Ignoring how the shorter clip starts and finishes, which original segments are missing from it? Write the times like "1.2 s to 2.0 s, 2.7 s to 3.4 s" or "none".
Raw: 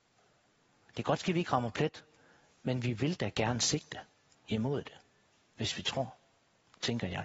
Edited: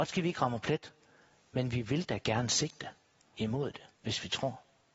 5.0 s to 5.5 s